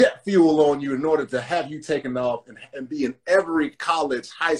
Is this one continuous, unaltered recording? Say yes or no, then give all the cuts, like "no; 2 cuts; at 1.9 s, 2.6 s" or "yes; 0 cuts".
yes; 0 cuts